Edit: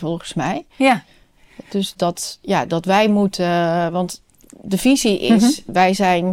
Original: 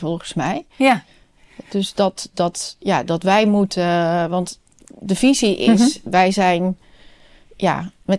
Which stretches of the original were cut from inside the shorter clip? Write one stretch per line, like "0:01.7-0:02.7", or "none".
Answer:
0:01.9-0:02.3